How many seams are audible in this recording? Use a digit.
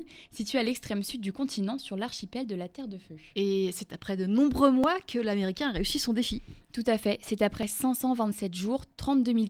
0